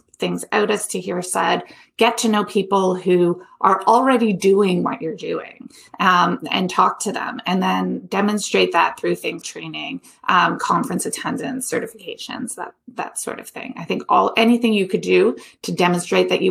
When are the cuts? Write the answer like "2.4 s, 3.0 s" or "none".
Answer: 9.4 s